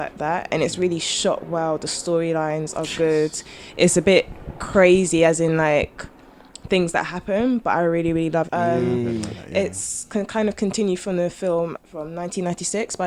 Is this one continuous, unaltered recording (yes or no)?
no